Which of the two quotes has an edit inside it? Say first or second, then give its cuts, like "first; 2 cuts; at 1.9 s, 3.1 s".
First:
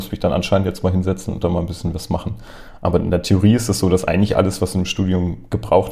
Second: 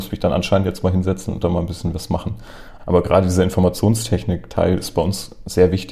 second; 1 cut; at 2.8 s